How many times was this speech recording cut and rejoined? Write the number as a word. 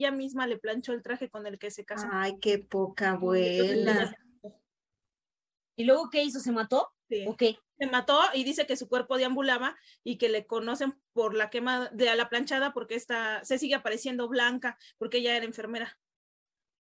one